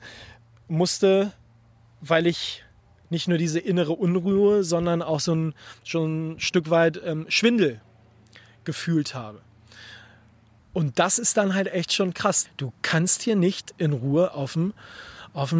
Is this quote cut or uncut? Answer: cut